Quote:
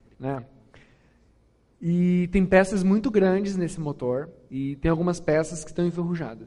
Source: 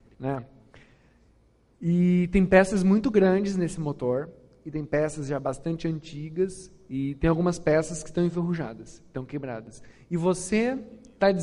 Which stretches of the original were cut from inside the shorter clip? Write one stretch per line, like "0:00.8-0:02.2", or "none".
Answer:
0:04.5-0:06.9